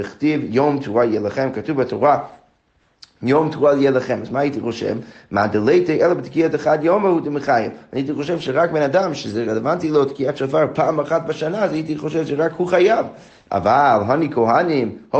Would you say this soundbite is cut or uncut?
uncut